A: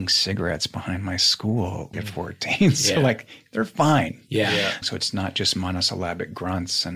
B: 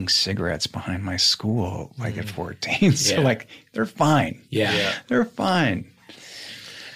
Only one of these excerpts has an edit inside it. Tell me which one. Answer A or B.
A